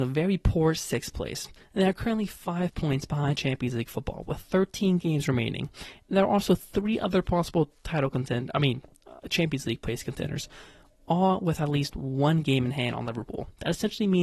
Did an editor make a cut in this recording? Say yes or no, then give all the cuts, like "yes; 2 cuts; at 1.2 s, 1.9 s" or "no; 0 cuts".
no; 0 cuts